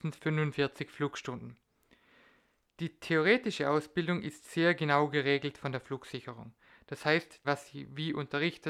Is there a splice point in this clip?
yes; 1 cut; at 7.4 s

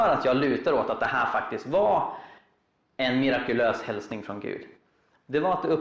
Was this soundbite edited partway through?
no; 0 cuts

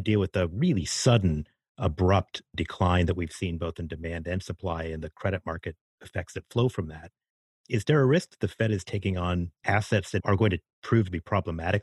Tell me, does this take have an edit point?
yes; 1 cut; at 9.5 s

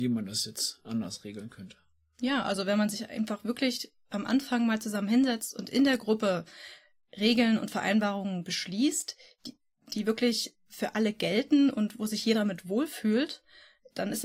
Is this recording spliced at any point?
no; 0 cuts

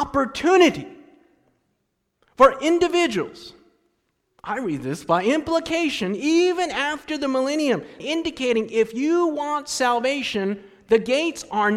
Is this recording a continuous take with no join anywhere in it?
no; 1 cut; at 8.0 s

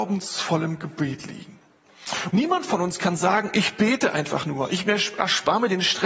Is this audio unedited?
no; 1 cut; at 2.3 s

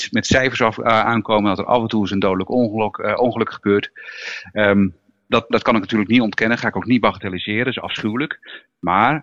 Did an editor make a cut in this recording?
yes; 1 cut; at 5.5 s

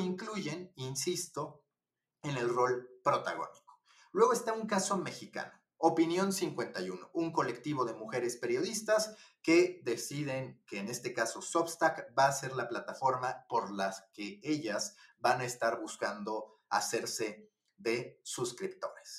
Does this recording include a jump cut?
no; 0 cuts

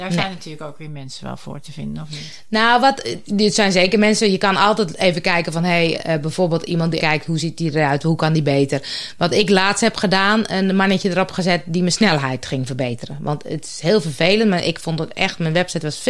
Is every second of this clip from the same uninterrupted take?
no; 2 cuts; at 5.9 s, 7.0 s

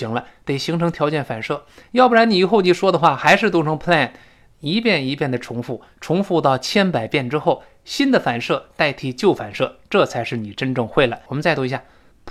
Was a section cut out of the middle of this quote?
yes; 1 cut; at 11.3 s

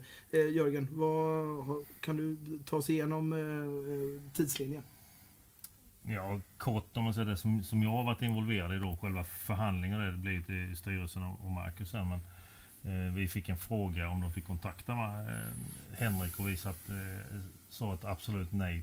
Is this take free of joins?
yes; 0 cuts

